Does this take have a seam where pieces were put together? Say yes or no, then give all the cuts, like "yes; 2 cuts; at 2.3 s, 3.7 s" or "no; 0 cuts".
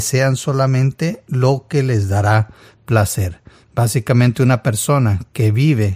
no; 0 cuts